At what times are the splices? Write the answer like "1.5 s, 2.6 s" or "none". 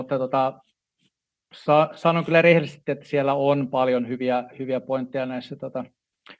none